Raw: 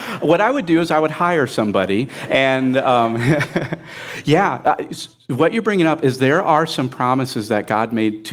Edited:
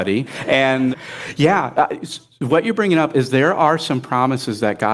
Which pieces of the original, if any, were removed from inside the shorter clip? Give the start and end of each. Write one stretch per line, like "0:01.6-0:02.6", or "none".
0:02.7-0:03.8

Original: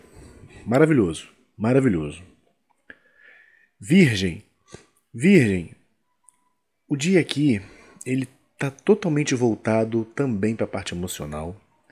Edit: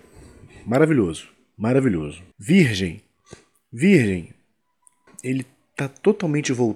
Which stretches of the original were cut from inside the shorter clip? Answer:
0:02.3-0:03.7
0:06.5-0:07.9

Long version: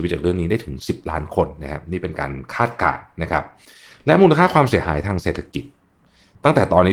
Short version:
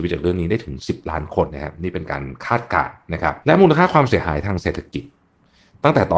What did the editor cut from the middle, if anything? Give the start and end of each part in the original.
0:01.5-0:01.6
0:03.5-0:04.0

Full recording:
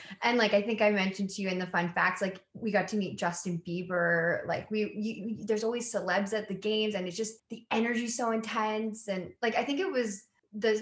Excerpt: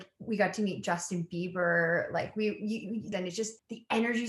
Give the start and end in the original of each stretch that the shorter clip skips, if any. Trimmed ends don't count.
0:05.5-0:06.9

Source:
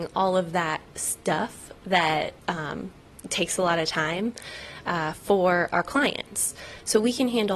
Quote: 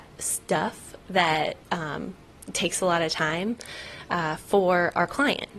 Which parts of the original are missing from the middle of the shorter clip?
none

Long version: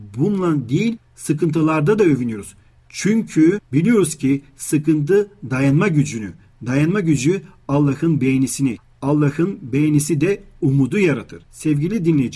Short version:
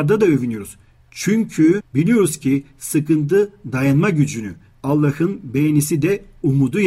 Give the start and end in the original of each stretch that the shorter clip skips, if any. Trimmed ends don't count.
0:06.6-0:09.0

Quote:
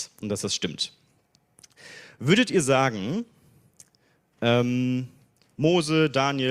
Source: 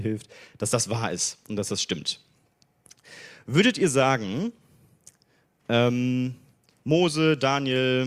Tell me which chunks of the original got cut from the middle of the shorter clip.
none

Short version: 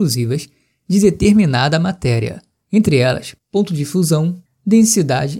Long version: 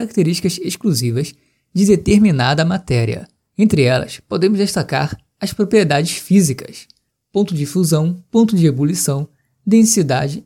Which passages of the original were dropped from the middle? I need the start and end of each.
0:04.2-0:07.2
0:08.3-0:09.5

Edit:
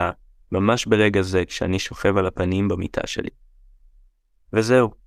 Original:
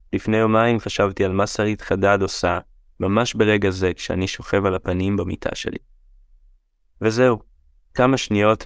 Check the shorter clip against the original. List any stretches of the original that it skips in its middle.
none

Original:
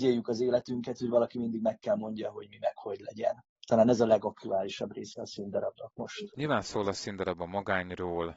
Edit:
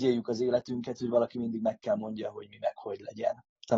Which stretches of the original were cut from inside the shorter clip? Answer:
none

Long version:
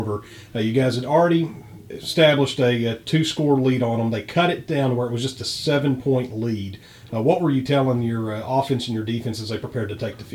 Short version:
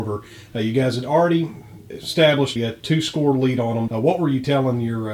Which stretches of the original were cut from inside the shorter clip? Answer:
0:02.6-0:02.8
0:04.1-0:07.1

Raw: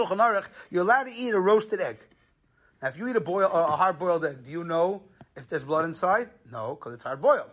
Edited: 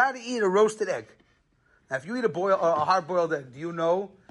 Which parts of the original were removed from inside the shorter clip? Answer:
none

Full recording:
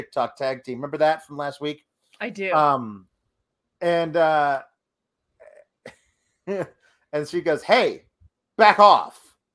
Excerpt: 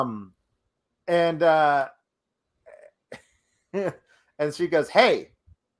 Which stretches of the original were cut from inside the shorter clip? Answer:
none

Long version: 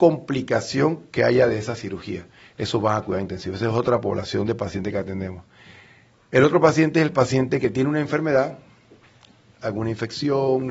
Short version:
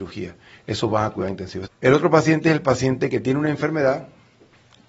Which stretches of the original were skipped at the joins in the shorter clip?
0:03.6-0:06.2

